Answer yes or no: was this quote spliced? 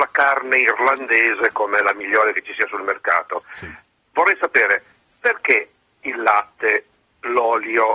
no